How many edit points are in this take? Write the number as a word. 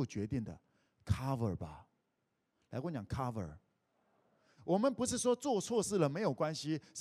one